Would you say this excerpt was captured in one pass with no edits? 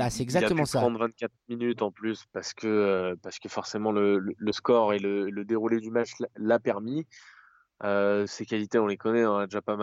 yes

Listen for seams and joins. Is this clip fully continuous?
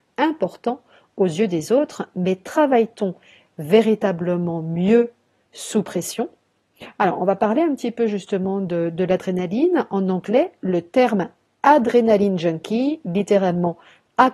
yes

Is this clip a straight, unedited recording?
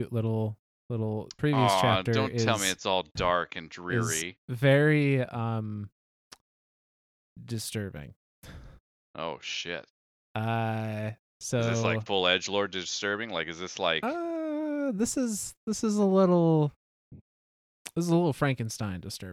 yes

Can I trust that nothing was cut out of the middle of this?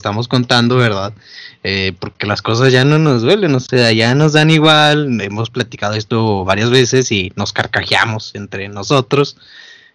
yes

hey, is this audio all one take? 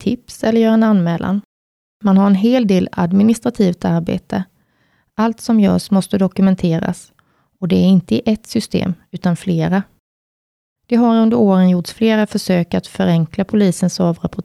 yes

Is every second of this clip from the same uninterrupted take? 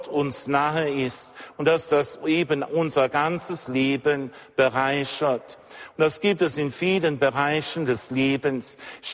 yes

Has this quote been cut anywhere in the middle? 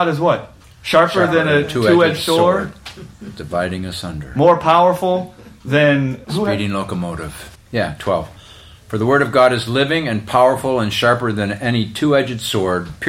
yes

